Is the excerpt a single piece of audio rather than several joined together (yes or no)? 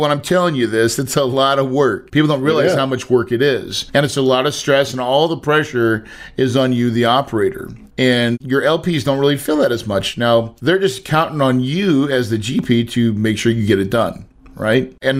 yes